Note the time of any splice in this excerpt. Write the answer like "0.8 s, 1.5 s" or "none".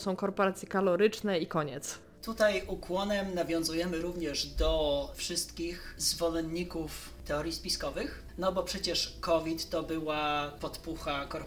none